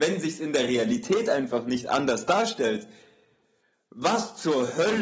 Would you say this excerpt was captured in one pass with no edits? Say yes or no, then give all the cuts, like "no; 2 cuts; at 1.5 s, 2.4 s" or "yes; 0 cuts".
yes; 0 cuts